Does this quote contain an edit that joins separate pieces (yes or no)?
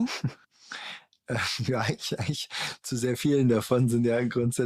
no